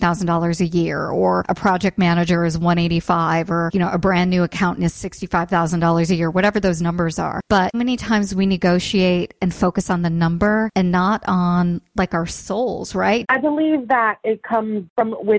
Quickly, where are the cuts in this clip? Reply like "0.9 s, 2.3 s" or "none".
7.7 s, 13.2 s